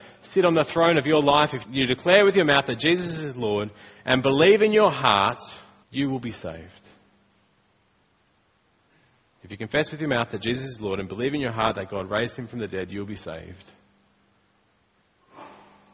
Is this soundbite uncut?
no; 2 cuts; at 1.6 s, 5.8 s

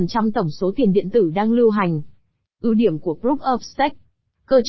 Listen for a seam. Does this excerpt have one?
yes; 1 cut; at 2.5 s

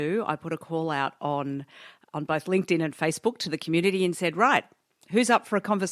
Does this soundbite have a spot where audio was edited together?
no; 0 cuts

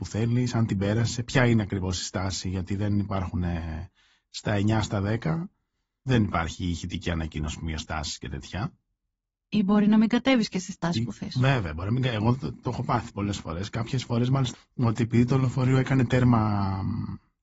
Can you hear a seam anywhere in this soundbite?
yes; 1 cut; at 14.5 s

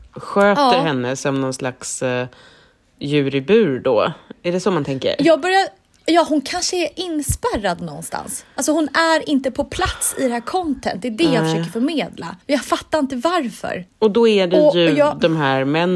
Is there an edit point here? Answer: yes; 2 cuts; at 12.4 s, 13.9 s

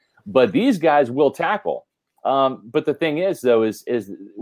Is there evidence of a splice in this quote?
no; 0 cuts

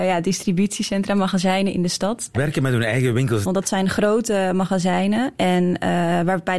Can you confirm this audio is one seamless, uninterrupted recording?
no; 2 cuts; at 2.3 s, 3.4 s

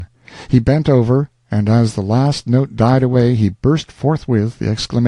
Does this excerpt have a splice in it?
no; 0 cuts

